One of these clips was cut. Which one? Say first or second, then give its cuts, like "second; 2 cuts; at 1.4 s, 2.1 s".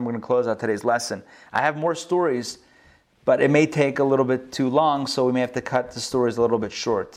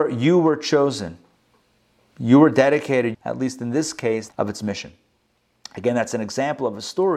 second; 2 cuts; at 3.1 s, 4.3 s